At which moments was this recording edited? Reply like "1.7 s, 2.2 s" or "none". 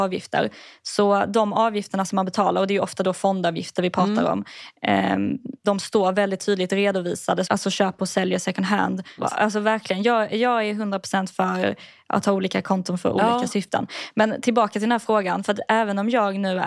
5.6 s, 7.4 s, 9.2 s